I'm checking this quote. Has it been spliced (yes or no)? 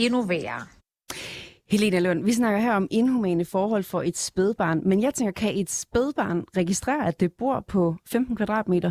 no